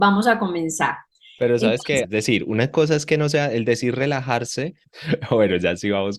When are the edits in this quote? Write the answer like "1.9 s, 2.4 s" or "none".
2.0 s, 4.8 s